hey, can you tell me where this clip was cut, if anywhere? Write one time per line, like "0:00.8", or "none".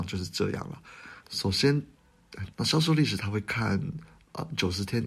0:01.2
0:02.5